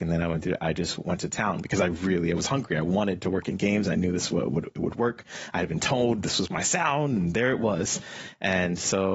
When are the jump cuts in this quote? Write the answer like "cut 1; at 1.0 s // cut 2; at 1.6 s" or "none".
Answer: none

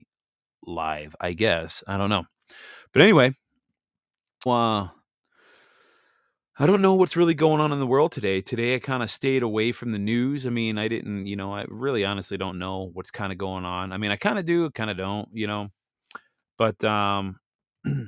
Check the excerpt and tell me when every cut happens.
cut 1; at 4.5 s

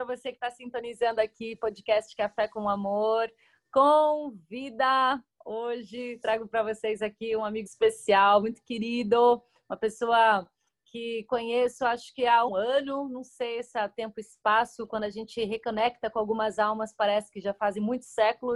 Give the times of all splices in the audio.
cut 1; at 7.7 s // cut 2; at 12.5 s

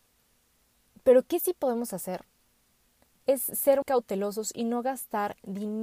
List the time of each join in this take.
cut 1; at 3.8 s

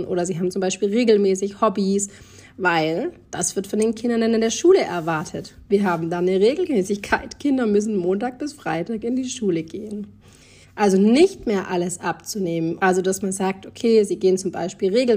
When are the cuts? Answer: cut 1; at 10.6 s // cut 2; at 12.8 s

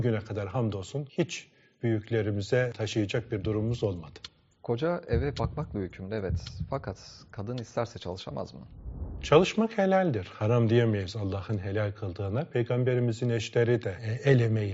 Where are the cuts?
none

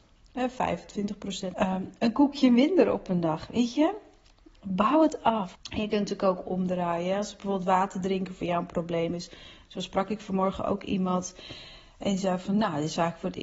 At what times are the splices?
cut 1; at 1.5 s // cut 2; at 5.6 s

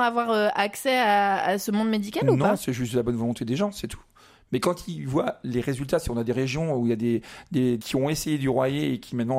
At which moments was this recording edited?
cut 1; at 7.8 s

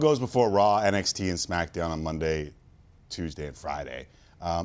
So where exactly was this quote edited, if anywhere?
none

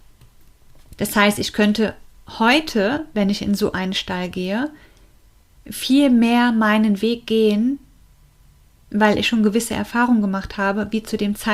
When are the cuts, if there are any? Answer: cut 1; at 1.0 s

